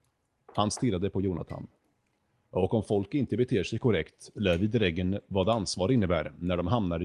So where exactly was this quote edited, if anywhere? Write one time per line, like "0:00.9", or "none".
none